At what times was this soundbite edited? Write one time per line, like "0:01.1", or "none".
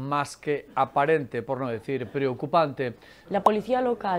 0:03.3